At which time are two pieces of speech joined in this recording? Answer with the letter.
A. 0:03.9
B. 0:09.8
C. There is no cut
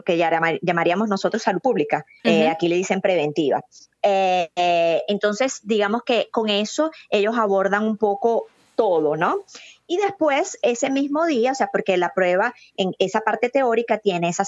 C